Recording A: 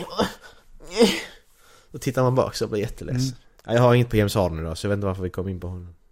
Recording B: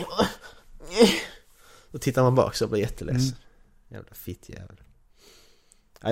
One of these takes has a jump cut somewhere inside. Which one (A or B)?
A